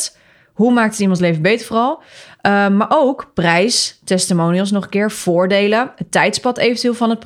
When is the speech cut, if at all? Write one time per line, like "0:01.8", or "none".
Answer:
none